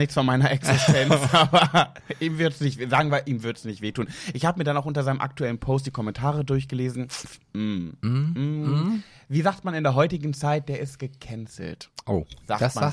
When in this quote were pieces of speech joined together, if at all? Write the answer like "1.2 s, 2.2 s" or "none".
none